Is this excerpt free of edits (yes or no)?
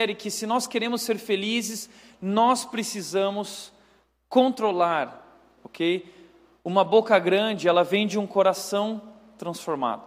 no